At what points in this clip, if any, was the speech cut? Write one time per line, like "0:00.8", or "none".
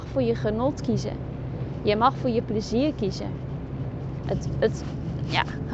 0:04.2